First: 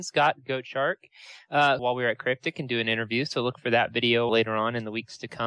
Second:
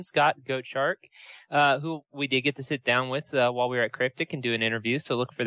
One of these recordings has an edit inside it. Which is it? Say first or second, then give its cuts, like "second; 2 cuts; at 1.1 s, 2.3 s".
first; 2 cuts; at 1.8 s, 4.3 s